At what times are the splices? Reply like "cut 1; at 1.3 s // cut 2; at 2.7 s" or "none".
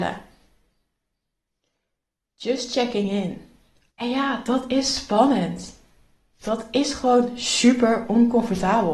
cut 1; at 3.9 s